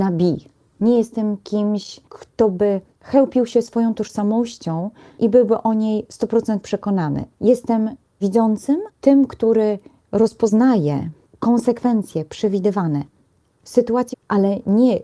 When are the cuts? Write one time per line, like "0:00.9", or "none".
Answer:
0:07.3
0:08.9
0:14.1

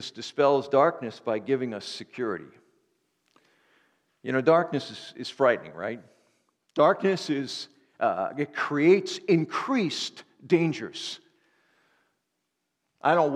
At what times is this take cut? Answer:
none

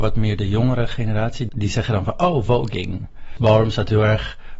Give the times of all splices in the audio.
0:01.5

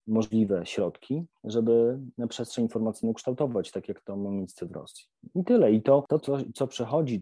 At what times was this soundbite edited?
0:06.2

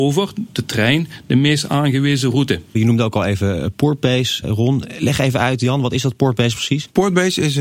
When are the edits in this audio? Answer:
0:02.7
0:04.4

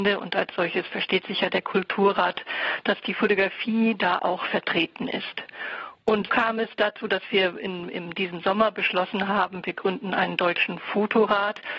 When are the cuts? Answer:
0:06.3

